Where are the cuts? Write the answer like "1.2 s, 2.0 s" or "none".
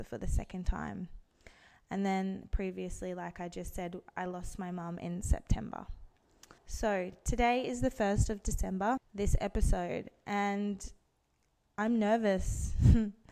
6.6 s, 9.0 s